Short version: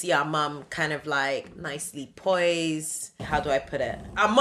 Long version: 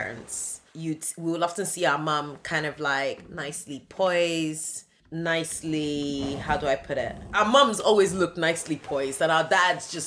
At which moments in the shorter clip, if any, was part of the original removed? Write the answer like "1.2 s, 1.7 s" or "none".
3.2 s